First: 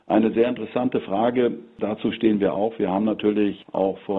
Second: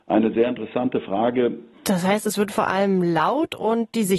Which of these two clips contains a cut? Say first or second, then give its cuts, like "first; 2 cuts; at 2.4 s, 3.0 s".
second; 1 cut; at 1.7 s